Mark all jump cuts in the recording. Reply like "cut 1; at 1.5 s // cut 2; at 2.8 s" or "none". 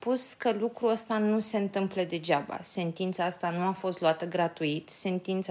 none